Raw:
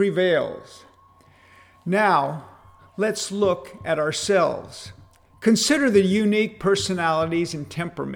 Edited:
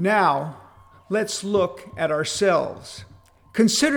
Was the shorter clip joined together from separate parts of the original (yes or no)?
no